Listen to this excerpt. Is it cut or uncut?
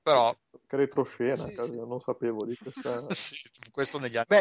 uncut